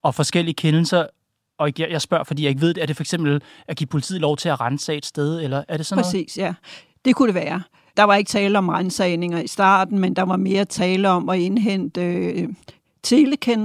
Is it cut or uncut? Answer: uncut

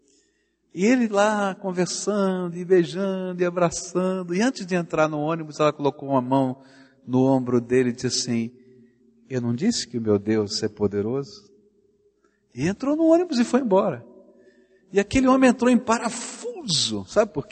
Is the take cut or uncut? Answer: uncut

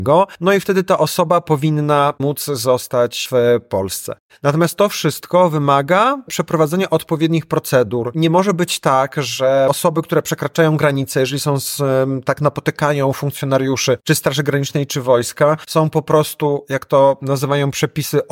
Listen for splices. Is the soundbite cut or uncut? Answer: uncut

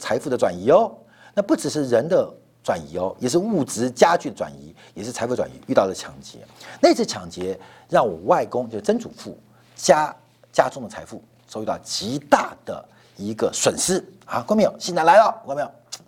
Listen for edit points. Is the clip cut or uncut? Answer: uncut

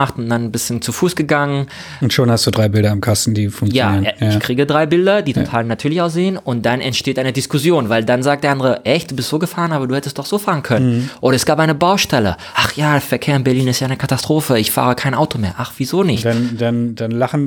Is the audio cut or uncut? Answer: uncut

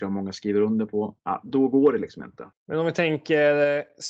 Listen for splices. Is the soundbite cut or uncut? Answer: cut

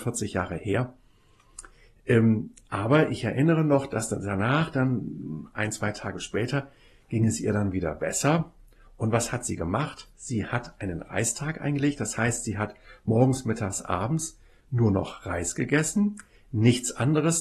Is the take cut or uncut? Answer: uncut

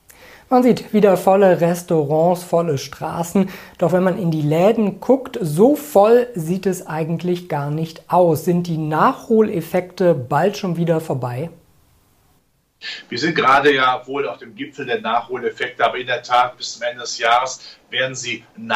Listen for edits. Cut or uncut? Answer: uncut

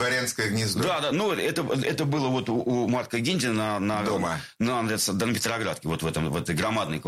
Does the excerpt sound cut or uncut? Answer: uncut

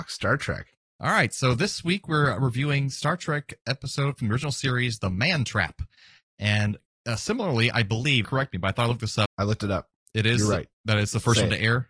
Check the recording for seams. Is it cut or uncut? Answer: cut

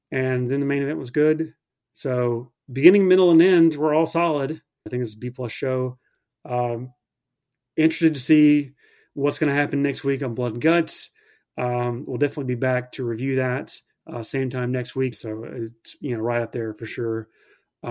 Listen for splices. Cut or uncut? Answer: cut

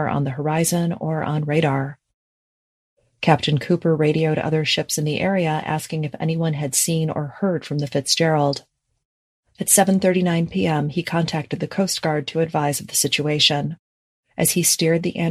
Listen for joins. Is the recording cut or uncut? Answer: uncut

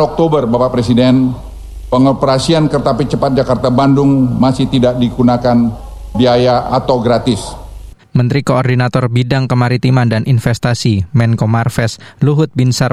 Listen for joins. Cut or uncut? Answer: cut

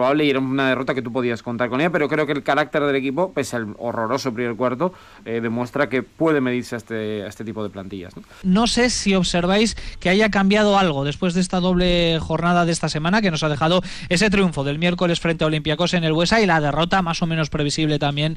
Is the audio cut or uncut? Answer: cut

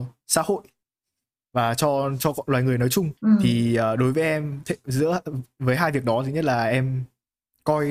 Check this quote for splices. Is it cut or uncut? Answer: cut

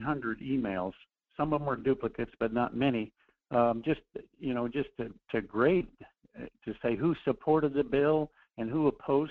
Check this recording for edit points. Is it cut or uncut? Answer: uncut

